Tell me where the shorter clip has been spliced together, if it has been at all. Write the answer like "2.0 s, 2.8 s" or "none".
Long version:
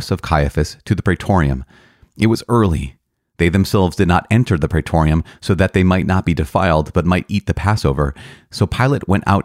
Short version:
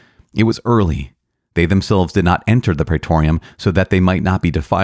none